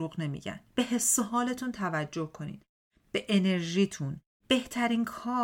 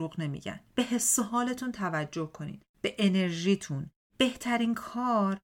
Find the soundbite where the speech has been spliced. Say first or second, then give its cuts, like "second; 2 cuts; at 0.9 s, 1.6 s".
second; 1 cut; at 2.7 s